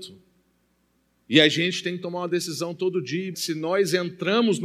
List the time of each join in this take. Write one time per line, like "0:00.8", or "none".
0:03.3